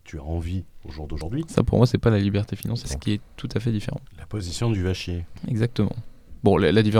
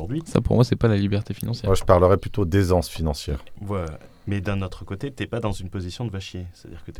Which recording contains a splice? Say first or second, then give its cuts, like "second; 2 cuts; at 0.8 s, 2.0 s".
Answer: first; 1 cut; at 2.8 s